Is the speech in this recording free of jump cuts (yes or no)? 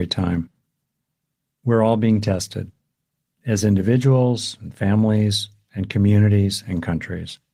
yes